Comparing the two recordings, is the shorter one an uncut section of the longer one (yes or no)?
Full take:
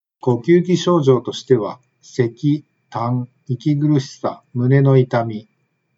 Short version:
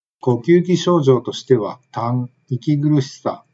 no